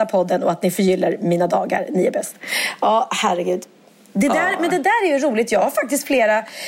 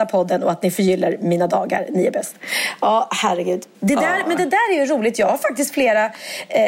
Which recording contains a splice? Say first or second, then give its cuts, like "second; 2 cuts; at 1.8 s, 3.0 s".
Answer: second; 1 cut; at 3.7 s